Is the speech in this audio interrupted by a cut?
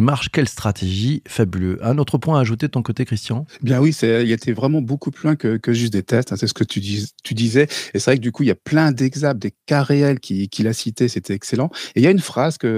no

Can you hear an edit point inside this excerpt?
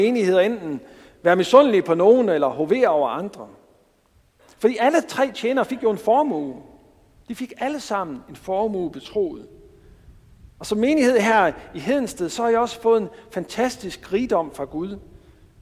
no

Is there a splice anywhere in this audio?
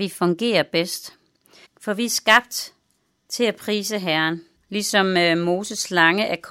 yes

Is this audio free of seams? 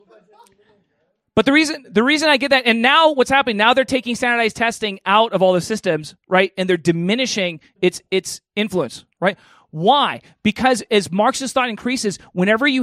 yes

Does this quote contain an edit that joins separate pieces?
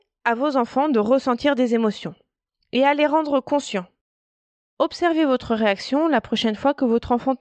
no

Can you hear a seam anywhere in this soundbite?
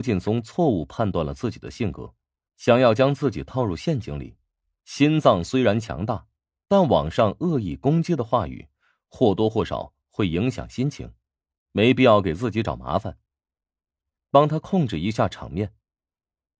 yes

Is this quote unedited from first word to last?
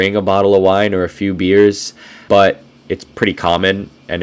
no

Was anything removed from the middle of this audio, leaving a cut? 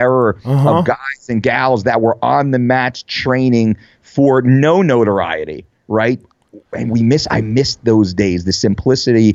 no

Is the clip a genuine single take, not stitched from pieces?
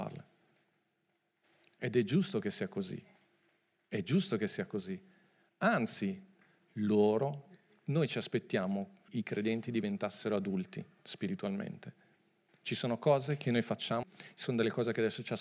no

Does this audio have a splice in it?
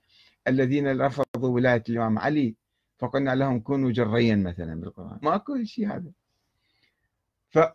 yes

